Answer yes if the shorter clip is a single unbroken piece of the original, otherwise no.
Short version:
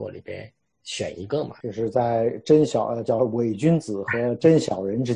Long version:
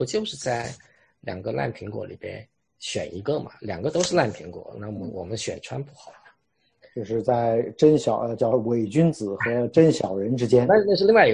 no